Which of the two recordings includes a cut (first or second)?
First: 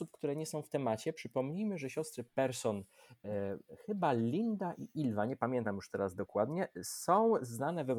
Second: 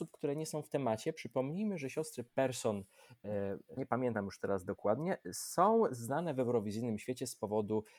second